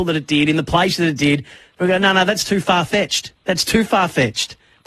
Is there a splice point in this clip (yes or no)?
no